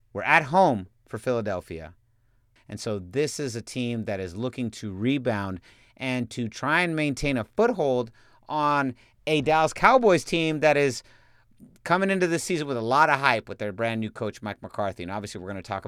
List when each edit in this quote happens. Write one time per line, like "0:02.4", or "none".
0:02.6